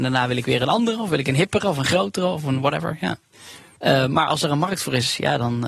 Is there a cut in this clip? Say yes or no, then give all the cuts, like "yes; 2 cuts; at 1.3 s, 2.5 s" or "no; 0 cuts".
yes; 1 cut; at 3.8 s